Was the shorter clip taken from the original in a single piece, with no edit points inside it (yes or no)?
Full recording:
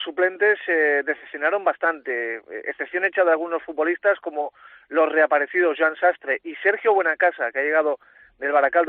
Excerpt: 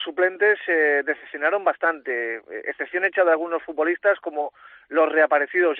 yes